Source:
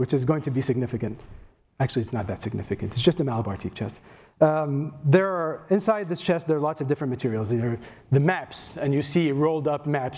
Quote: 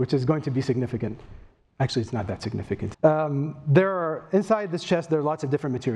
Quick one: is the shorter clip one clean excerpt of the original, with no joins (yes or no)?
no